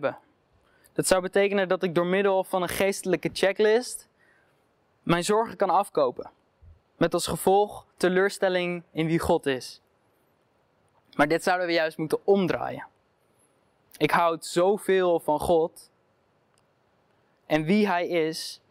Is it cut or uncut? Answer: uncut